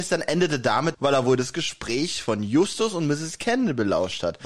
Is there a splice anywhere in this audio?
yes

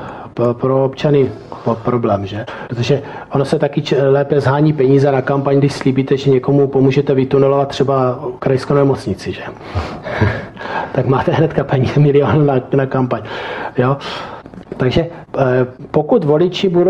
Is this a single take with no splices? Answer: yes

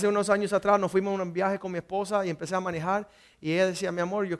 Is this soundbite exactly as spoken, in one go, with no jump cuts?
yes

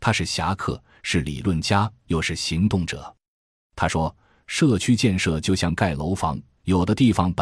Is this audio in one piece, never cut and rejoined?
yes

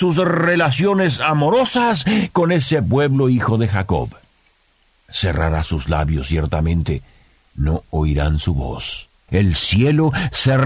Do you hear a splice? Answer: yes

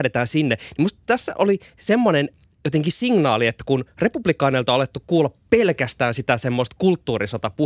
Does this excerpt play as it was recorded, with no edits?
yes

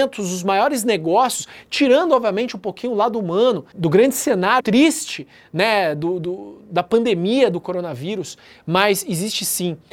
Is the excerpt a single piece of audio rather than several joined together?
no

